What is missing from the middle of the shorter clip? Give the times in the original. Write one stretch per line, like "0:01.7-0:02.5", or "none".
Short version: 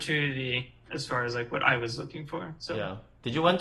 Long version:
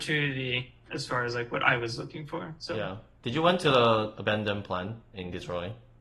none